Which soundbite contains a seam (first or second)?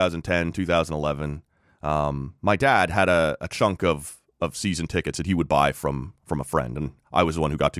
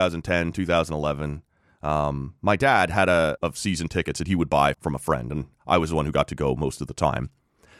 second